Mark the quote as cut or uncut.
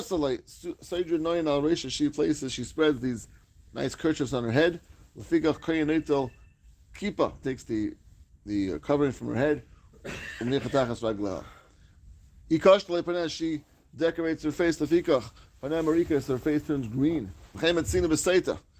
cut